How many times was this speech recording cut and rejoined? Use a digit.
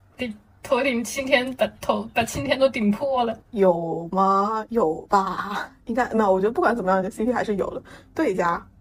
1